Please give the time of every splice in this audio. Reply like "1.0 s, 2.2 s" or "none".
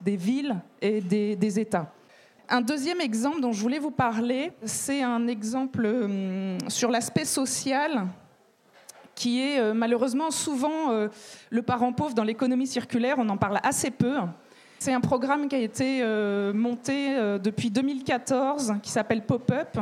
2.4 s